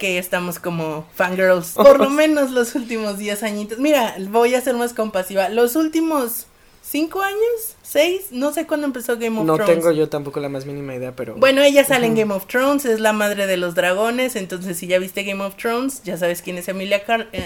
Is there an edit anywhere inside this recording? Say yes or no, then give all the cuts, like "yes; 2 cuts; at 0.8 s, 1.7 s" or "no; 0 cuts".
yes; 1 cut; at 1.8 s